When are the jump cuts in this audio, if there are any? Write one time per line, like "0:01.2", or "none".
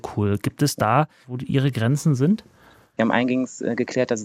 0:01.2
0:03.0